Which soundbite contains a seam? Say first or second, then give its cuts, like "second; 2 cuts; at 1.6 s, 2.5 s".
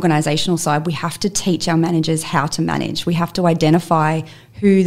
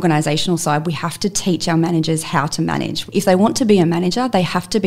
second; 1 cut; at 3.1 s